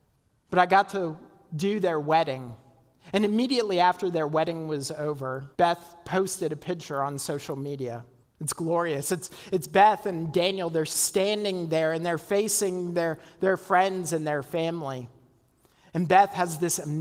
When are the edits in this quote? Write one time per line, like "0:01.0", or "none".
0:05.5
0:08.2